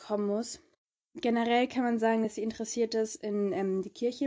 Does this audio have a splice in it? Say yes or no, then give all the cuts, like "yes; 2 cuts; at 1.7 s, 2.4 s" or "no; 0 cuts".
no; 0 cuts